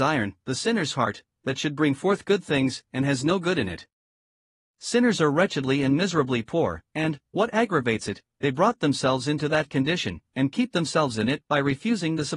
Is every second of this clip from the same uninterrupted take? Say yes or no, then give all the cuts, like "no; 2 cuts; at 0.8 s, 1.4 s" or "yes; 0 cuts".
no; 1 cut; at 2.8 s